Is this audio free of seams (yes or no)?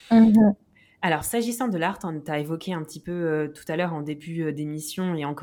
yes